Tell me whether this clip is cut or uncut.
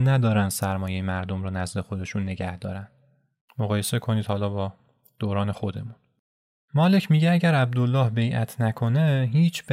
cut